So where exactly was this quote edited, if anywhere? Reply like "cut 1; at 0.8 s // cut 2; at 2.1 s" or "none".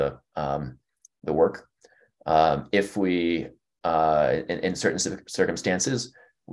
none